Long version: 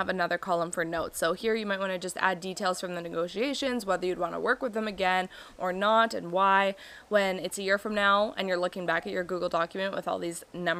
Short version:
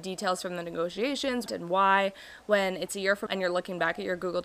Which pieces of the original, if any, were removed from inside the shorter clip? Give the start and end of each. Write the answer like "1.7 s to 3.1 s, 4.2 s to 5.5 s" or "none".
3.8 s to 6.1 s, 7.9 s to 8.3 s